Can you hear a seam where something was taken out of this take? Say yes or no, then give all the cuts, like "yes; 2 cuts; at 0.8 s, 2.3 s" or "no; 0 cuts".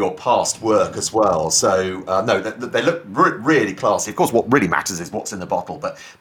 no; 0 cuts